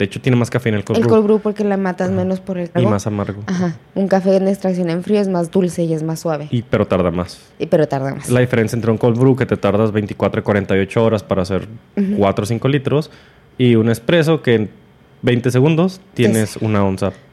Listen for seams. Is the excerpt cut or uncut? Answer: cut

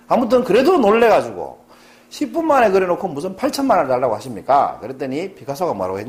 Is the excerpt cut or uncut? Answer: uncut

